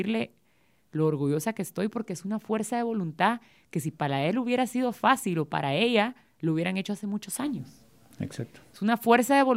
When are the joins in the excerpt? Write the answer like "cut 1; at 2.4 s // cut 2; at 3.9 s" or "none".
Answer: none